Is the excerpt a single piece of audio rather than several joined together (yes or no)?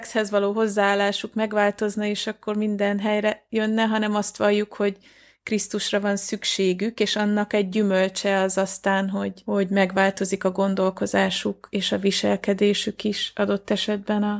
yes